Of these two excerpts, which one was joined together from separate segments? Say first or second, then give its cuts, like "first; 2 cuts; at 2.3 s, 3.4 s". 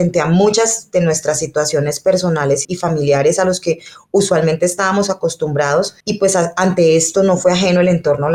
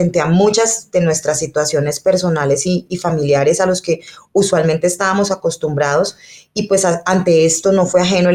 first; 2 cuts; at 2.6 s, 6.0 s